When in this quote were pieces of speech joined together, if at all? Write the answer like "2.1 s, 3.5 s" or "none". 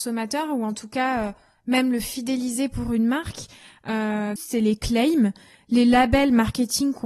4.4 s